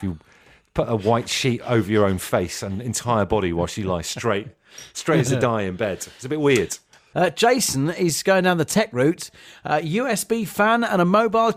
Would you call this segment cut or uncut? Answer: uncut